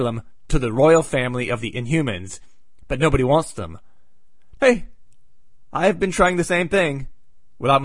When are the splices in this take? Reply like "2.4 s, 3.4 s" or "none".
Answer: 2.8 s, 4.6 s